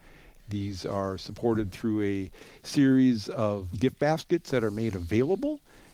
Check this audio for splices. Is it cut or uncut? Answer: cut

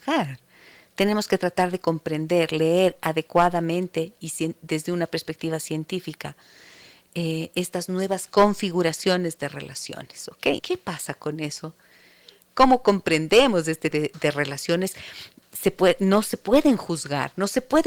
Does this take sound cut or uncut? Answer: cut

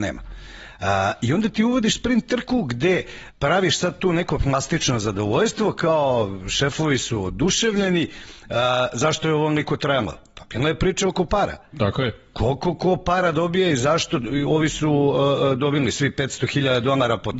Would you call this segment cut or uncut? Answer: cut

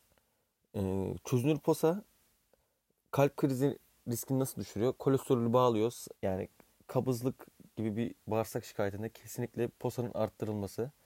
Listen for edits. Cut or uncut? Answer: cut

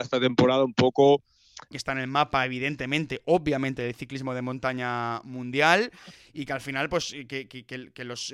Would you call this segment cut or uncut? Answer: cut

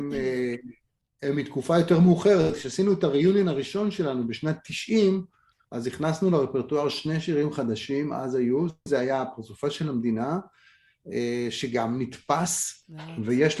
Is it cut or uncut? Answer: cut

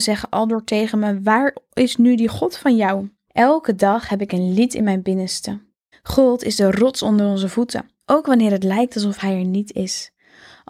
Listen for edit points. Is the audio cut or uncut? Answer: cut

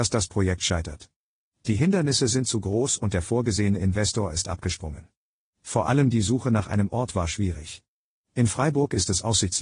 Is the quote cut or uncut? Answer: uncut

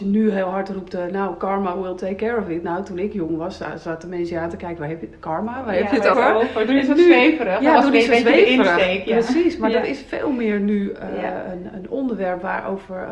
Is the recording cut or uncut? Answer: cut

